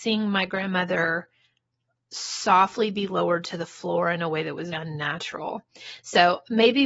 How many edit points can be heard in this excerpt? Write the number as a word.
one